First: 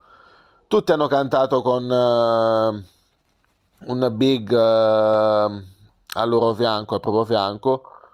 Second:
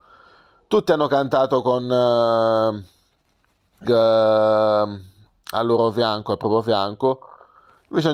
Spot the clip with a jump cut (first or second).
second